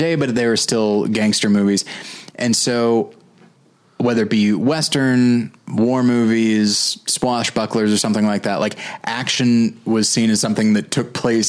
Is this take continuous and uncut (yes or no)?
yes